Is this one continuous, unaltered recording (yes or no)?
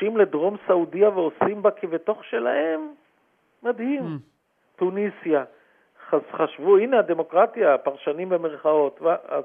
yes